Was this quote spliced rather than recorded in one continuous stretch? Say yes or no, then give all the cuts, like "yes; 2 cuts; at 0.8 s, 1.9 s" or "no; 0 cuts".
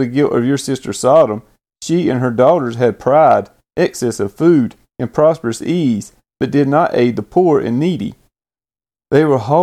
no; 0 cuts